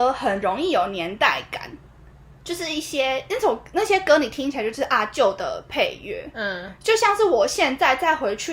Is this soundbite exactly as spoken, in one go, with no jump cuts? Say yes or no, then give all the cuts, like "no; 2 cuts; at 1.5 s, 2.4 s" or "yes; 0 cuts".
yes; 0 cuts